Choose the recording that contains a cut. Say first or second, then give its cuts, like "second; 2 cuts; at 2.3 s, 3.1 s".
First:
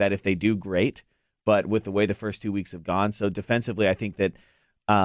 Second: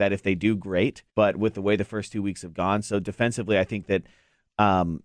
second; 1 cut; at 1.1 s